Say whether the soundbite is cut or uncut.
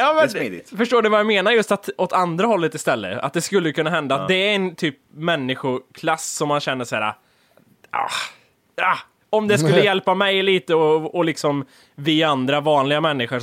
uncut